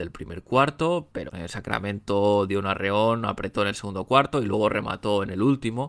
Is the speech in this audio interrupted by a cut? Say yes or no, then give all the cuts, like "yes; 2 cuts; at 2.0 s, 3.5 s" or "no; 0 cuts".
yes; 1 cut; at 1.3 s